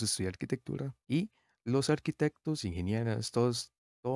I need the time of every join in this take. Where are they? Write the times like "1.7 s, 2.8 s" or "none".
1.0 s, 2.6 s